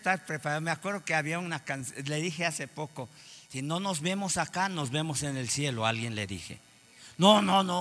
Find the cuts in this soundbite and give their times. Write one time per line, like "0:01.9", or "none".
none